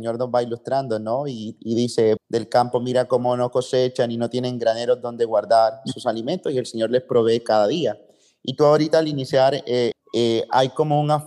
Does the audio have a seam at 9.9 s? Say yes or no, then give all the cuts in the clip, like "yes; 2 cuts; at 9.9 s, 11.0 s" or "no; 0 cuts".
yes; 2 cuts; at 2.2 s, 9.9 s